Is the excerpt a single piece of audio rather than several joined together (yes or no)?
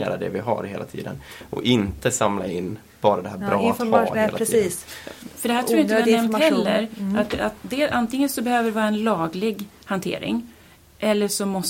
yes